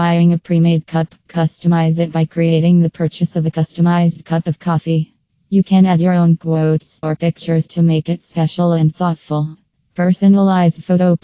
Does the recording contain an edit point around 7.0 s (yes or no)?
yes